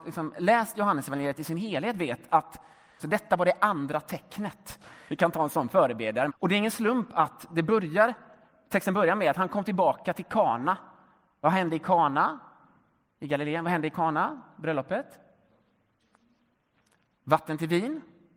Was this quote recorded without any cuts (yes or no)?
no